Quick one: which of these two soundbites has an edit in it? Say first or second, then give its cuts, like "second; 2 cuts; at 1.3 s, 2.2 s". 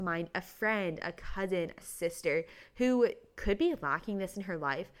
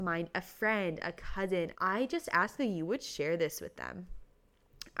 second; 1 cut; at 1.7 s